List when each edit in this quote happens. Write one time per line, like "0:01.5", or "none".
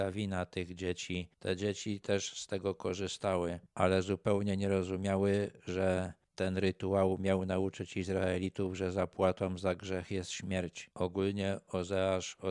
0:01.3